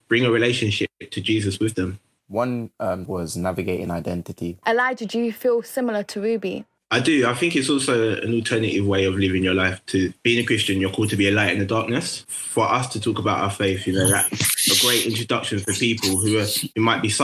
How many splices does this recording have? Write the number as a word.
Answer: two